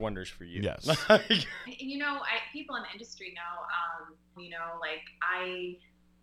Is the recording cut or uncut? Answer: cut